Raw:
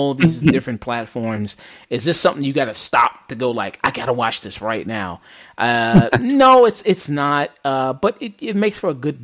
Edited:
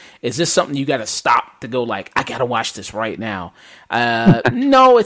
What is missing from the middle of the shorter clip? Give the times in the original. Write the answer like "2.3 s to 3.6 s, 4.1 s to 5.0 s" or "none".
none